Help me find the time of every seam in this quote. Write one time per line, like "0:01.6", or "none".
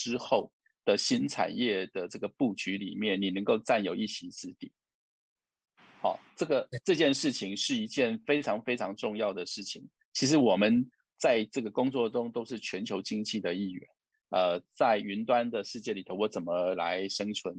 0:10.0
0:14.1